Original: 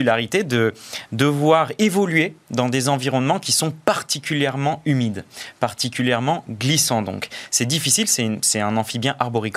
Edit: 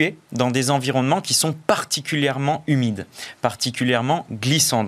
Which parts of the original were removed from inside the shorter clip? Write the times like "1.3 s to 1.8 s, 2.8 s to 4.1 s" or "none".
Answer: none